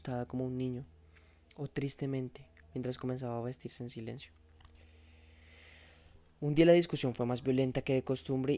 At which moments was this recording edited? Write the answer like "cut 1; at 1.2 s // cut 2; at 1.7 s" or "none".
cut 1; at 2.6 s

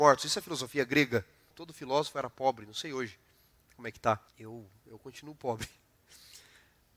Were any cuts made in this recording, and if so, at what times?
cut 1; at 1.5 s // cut 2; at 4.3 s

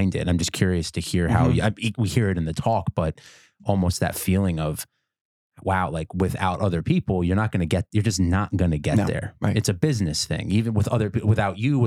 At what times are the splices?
none

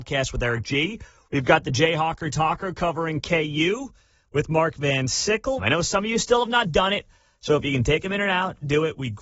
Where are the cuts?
cut 1; at 5.6 s

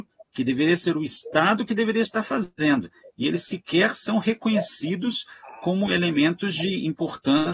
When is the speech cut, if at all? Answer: none

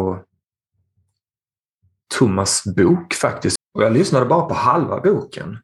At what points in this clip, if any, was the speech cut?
cut 1; at 3.6 s

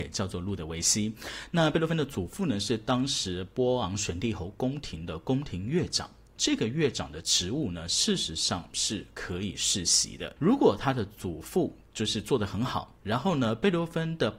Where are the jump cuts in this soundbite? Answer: cut 1; at 10.4 s

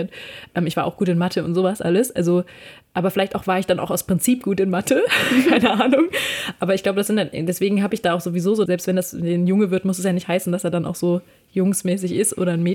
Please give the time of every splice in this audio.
cut 1; at 8.7 s

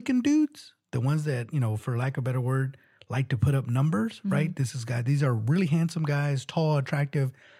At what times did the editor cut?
none

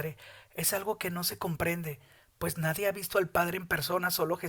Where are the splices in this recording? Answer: none

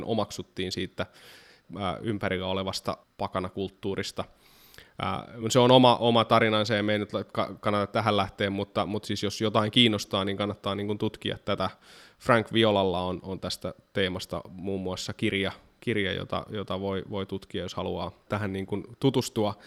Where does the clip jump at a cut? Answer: none

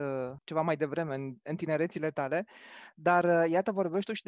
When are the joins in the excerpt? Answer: none

